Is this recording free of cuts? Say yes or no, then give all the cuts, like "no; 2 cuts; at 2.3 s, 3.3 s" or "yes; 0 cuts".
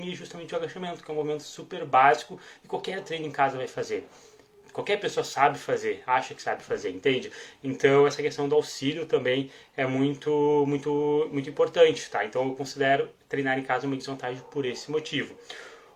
yes; 0 cuts